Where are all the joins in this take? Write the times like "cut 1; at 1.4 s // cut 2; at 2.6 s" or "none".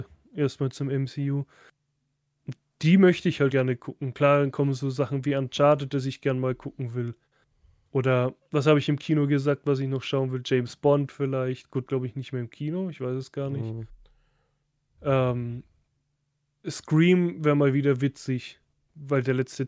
cut 1; at 3.5 s // cut 2; at 11.9 s